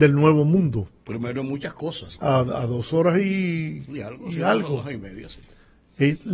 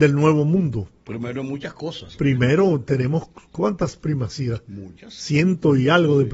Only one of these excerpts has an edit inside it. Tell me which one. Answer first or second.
first